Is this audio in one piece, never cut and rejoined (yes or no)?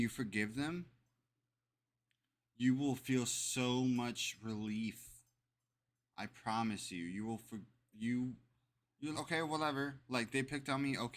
no